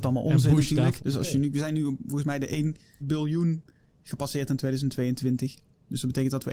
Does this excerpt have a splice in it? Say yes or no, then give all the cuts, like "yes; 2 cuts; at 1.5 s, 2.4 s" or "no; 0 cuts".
yes; 2 cuts; at 1.0 s, 3.0 s